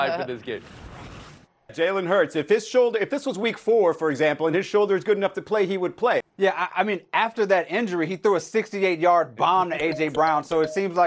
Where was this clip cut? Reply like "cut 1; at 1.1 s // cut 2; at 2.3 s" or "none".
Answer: cut 1; at 1.7 s // cut 2; at 6.2 s

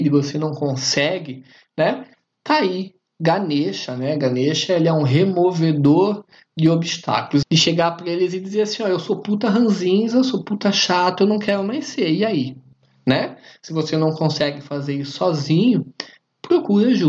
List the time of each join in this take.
cut 1; at 7.4 s

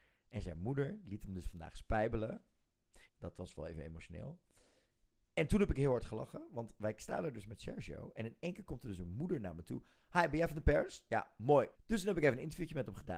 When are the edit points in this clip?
cut 1; at 3.1 s // cut 2; at 11.7 s

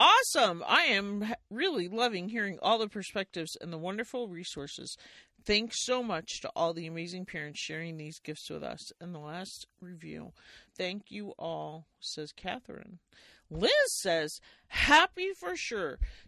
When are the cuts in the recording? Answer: cut 1; at 10.6 s

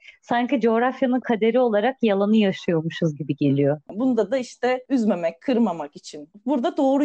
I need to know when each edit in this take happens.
cut 1; at 3.9 s

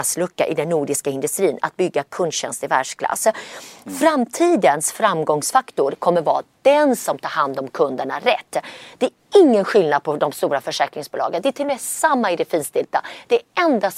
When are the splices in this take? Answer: none

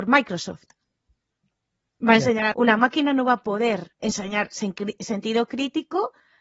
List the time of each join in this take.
cut 1; at 2.5 s // cut 2; at 4.0 s

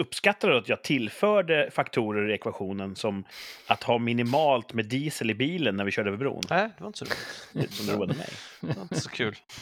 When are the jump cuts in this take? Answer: cut 1; at 7.7 s

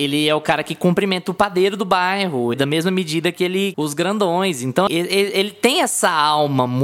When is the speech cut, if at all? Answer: cut 1; at 2.5 s // cut 2; at 3.7 s // cut 3; at 4.9 s

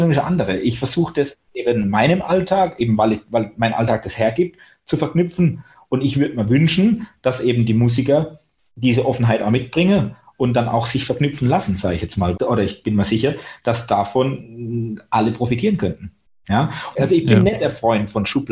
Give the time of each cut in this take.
cut 1; at 12.3 s // cut 2; at 16.9 s

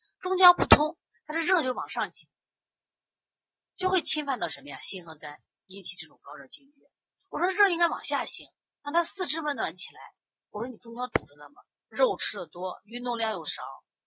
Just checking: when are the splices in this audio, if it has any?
none

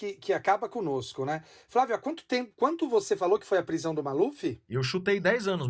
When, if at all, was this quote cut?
none

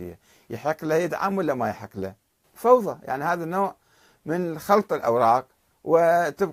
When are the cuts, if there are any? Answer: cut 1; at 2.4 s

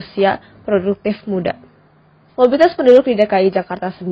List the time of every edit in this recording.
cut 1; at 2.3 s

